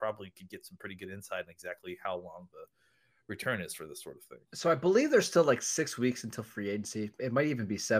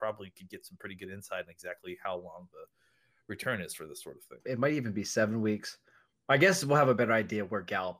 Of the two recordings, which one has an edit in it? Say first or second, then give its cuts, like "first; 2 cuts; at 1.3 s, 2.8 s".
second; 1 cut; at 4.4 s